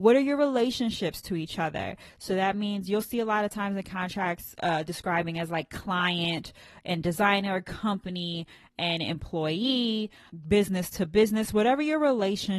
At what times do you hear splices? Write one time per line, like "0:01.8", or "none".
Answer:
none